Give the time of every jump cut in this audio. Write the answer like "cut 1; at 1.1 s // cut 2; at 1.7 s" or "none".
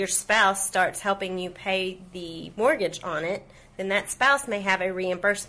none